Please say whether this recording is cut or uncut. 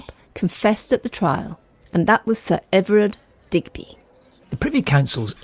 cut